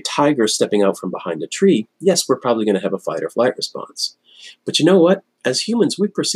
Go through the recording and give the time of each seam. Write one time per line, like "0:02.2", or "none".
0:05.3